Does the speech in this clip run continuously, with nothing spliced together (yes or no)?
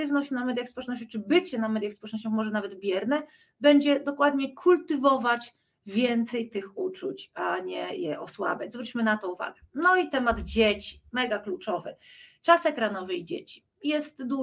yes